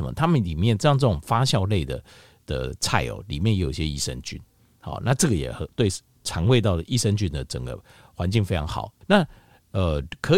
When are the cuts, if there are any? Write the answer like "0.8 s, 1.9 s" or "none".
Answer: 9.0 s